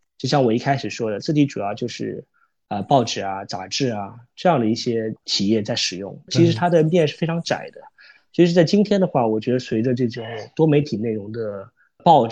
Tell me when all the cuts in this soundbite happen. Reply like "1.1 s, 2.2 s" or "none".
none